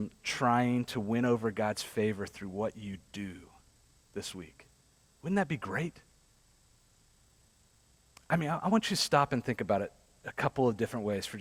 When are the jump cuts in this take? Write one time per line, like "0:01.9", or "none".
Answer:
none